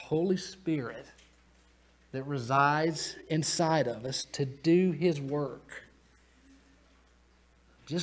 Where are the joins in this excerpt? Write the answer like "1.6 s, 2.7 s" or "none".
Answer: none

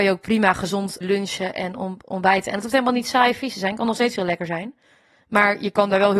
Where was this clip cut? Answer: 1.0 s

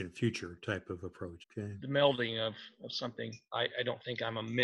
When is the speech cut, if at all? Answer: 1.4 s, 3.5 s

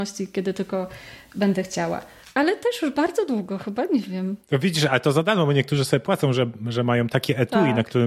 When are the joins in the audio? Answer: none

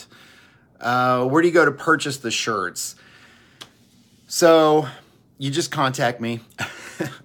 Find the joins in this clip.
none

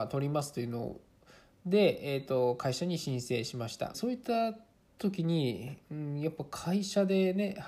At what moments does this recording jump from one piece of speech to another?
3.9 s

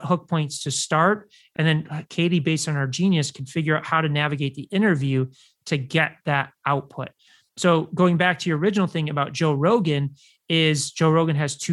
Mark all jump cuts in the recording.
none

